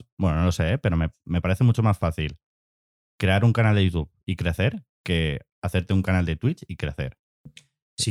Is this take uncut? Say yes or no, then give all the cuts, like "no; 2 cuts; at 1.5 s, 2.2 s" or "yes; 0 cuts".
yes; 0 cuts